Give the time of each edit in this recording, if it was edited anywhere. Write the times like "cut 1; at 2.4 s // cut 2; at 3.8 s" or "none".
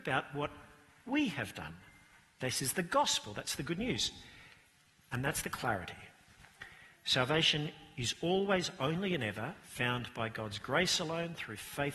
none